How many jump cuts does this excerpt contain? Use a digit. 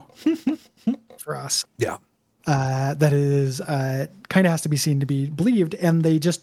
1